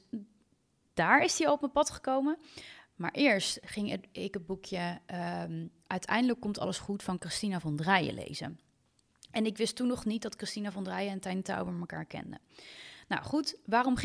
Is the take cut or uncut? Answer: uncut